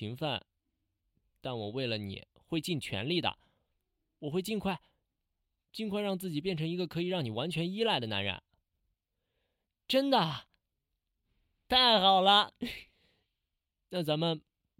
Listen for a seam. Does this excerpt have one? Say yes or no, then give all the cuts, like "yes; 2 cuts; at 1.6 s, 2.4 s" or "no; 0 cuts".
yes; 2 cuts; at 9.9 s, 12.9 s